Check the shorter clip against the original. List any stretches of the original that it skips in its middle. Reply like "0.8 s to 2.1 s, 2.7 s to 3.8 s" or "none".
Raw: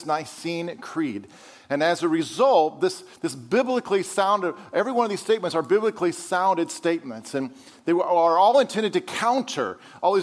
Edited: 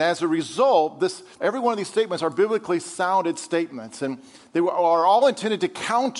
3.2 s to 4.7 s